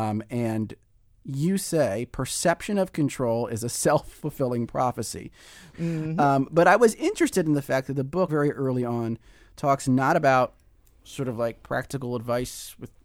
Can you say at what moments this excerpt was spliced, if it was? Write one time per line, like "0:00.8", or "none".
0:05.7
0:08.3